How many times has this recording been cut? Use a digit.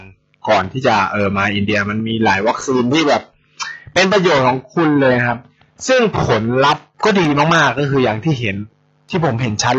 1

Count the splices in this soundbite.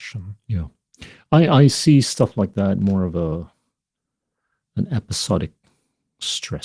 0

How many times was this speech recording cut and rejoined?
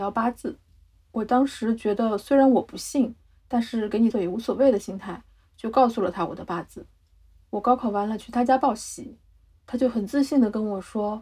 1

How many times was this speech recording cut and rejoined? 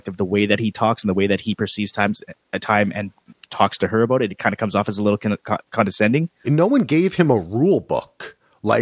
1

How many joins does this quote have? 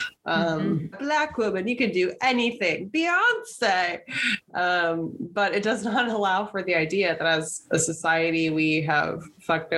1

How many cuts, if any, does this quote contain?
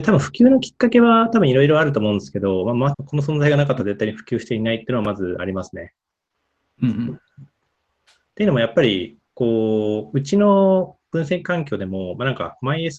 2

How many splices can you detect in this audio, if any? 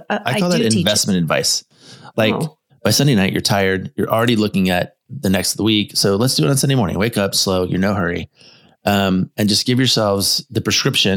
1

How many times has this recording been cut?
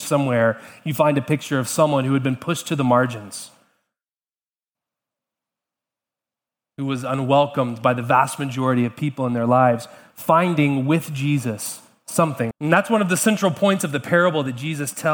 1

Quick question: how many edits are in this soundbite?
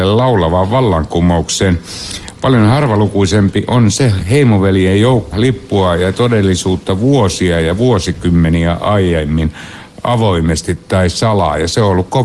1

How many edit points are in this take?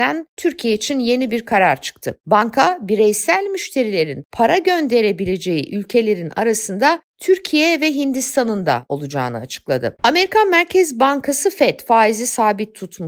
1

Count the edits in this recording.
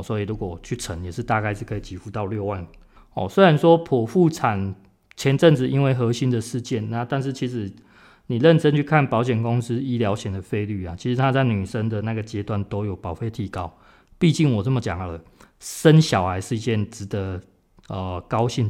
2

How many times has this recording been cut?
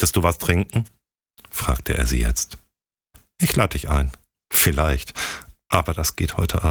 1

